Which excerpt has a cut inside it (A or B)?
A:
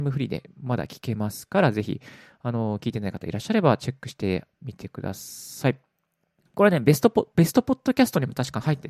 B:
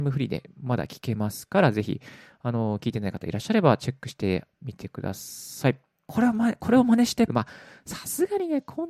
B